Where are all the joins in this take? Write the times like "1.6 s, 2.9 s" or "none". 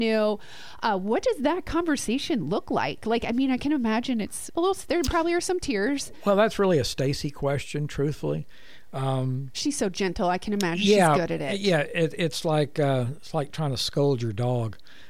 none